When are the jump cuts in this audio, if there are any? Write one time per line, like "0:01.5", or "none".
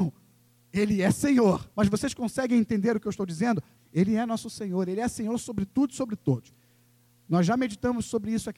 0:01.7
0:03.8